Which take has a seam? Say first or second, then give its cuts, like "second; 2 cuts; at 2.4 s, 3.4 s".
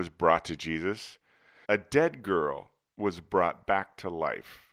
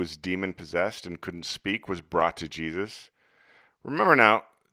first; 1 cut; at 1.6 s